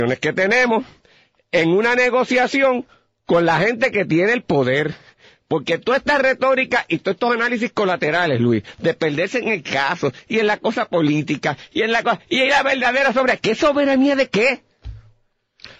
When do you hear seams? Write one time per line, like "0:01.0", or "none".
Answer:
none